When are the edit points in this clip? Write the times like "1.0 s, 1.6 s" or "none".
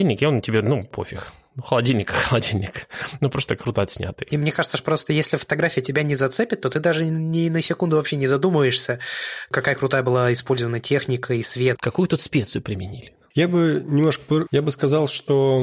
11.7 s, 13.3 s, 14.5 s